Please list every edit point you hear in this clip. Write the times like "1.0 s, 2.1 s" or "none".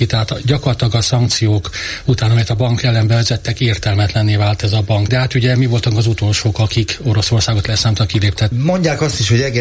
5.1 s, 8.5 s

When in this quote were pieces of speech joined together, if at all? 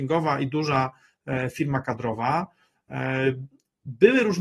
none

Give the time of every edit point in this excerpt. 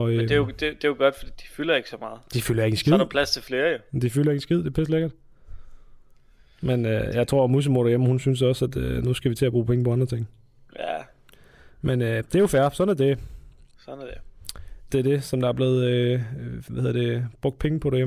14.9 s

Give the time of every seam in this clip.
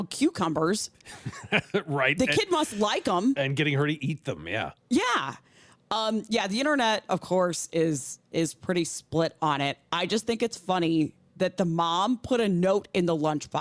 none

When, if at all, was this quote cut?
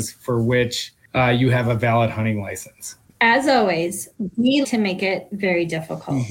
4.6 s

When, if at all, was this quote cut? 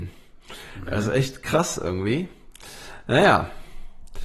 none

